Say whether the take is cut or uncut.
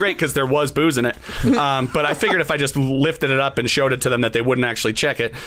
uncut